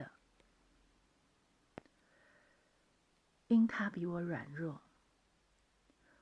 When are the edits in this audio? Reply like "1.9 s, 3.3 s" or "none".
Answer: none